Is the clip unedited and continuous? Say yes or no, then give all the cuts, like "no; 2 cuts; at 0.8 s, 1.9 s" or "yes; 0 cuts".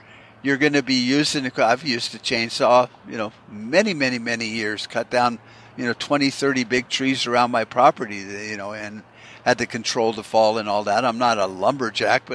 yes; 0 cuts